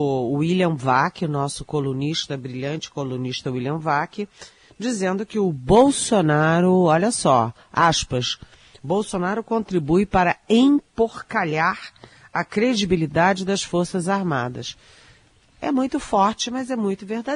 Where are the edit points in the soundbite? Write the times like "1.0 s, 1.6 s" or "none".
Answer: none